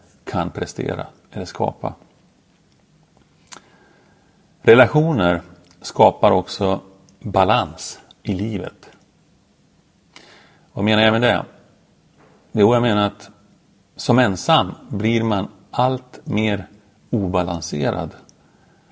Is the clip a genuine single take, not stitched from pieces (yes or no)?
yes